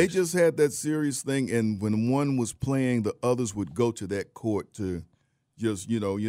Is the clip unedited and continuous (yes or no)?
yes